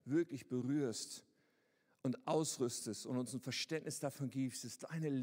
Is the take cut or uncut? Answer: uncut